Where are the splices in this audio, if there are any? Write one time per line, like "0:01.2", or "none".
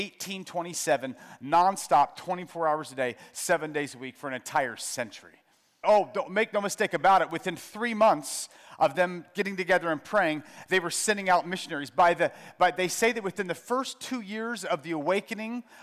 0:05.8

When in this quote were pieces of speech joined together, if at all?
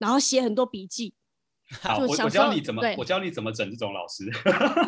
none

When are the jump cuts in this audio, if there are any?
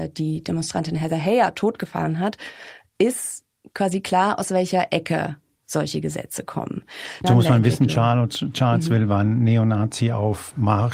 0:07.2

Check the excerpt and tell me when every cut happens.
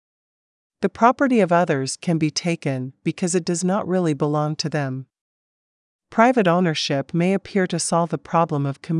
none

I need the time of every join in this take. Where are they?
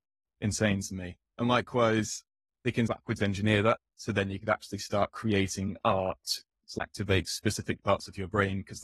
0:06.6

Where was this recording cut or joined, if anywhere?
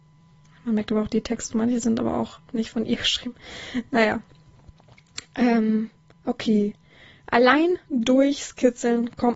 none

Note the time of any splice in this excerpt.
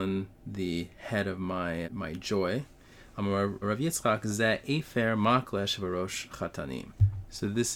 0:01.8
0:03.6

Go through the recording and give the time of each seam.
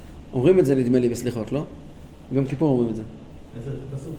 none

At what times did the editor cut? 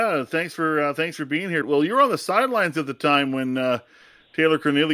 0:01.6

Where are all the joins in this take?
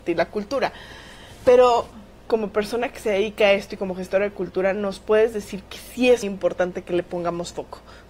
0:02.3
0:06.2

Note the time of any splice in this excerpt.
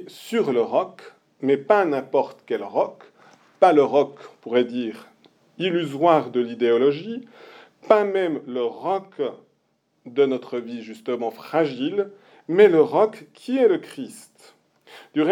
none

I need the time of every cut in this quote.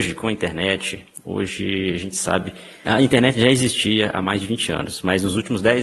0:02.8

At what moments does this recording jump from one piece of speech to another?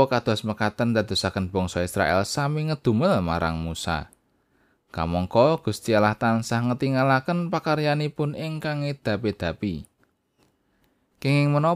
none

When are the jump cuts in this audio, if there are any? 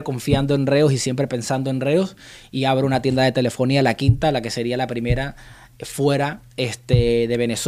none

